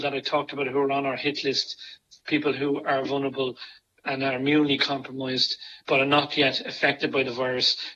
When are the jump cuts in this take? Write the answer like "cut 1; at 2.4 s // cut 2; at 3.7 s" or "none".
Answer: cut 1; at 3.0 s // cut 2; at 5.8 s

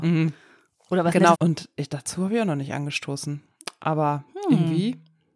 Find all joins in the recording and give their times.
cut 1; at 1.3 s

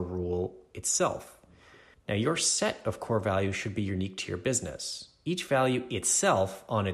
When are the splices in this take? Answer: cut 1; at 1.9 s

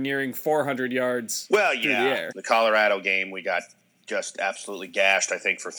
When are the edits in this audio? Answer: cut 1; at 2.3 s

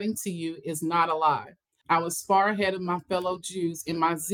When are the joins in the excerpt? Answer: cut 1; at 1.8 s

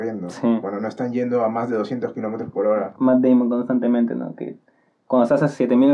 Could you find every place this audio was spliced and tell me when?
cut 1; at 3.0 s

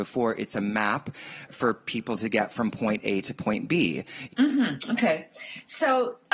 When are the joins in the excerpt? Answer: cut 1; at 1.5 s // cut 2; at 4.3 s

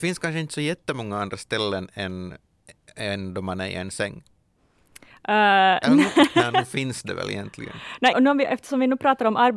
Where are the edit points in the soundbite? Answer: cut 1; at 8.1 s

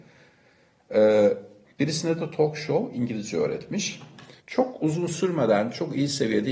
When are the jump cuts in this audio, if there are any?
cut 1; at 1.6 s // cut 2; at 4.4 s

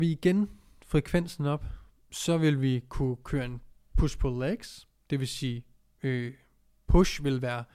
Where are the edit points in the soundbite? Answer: none

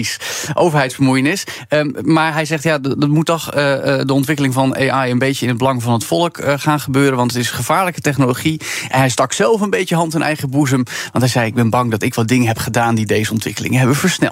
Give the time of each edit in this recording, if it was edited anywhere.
none

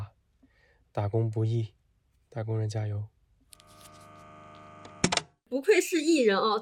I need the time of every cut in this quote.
none

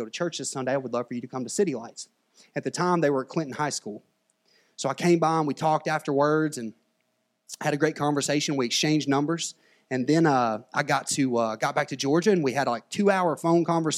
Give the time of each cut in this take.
none

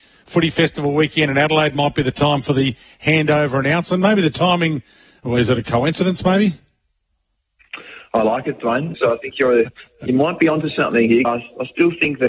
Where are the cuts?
cut 1; at 8.9 s // cut 2; at 11.2 s

